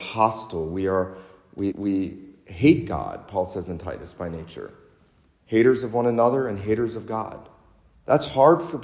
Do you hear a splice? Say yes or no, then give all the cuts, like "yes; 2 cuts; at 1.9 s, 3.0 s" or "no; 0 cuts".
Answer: yes; 1 cut; at 1.7 s